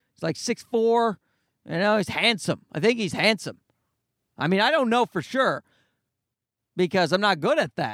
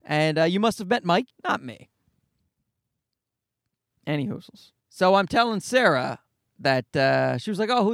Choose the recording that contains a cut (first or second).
second